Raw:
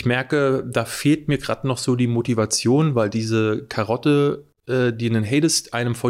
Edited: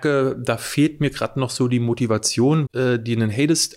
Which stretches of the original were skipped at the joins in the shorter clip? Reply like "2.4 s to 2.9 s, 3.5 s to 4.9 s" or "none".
2.9 s to 4.6 s